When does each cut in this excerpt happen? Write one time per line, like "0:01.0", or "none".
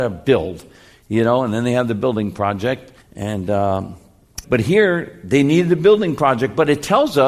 0:03.0
0:04.4